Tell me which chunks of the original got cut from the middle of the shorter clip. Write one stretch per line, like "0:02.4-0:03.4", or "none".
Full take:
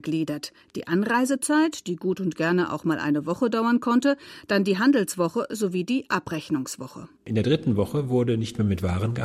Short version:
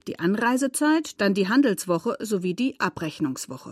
0:01.8-0:04.5

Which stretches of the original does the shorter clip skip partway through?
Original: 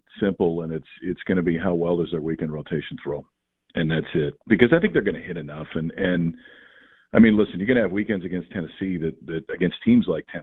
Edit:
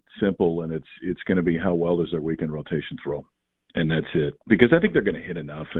none

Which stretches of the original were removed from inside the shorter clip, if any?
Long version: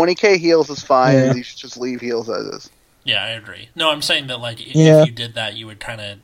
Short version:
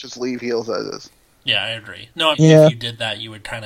0:03.9-0:04.7

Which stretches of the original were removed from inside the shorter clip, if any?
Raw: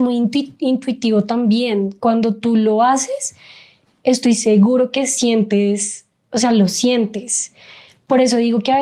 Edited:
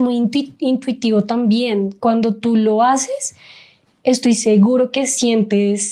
none

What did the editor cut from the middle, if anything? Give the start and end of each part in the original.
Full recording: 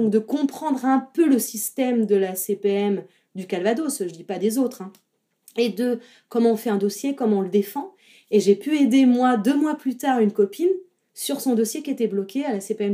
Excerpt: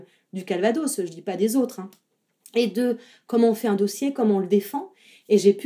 none

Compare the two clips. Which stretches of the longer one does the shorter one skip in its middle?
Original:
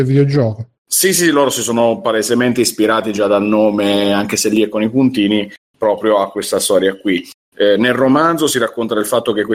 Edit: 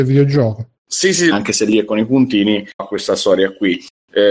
0:01.3-0:04.2
0:05.6-0:06.2

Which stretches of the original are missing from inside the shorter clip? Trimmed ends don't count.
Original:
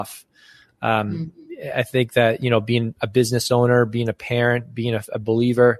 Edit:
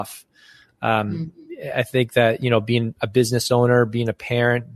none

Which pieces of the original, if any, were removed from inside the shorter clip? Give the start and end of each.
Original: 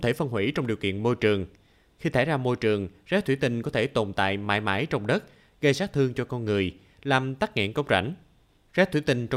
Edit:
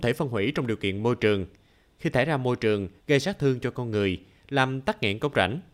0:03.0-0:05.5

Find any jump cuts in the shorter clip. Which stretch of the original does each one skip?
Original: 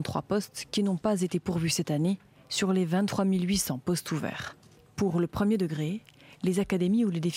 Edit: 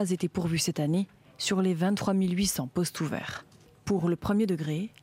none

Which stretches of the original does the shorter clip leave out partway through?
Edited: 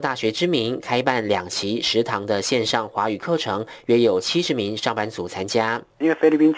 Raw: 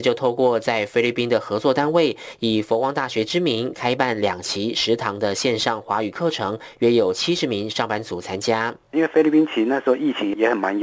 none

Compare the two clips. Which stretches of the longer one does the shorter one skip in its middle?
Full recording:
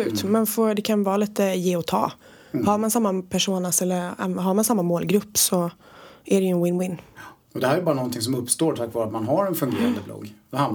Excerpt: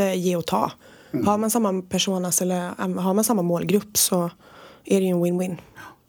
none

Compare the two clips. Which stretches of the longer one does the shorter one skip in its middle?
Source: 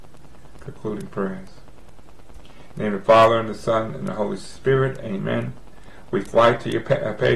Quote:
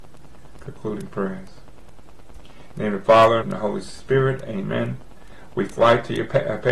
0:03.4-0:04.0

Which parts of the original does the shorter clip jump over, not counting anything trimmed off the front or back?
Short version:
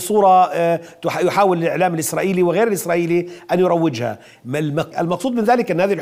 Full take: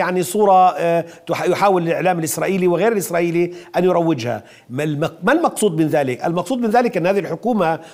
0:05.2-0:06.2

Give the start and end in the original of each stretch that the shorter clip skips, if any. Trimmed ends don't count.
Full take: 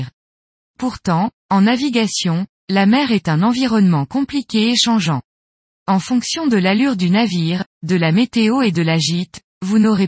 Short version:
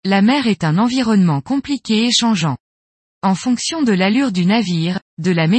none

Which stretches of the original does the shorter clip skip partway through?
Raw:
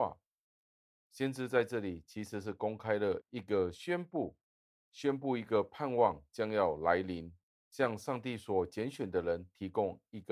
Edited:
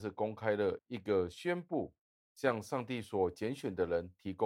0:04.7-0:07.6

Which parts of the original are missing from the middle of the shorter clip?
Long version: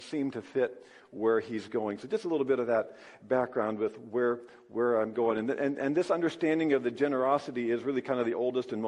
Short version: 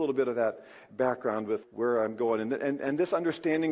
0:03.9-0:04.6

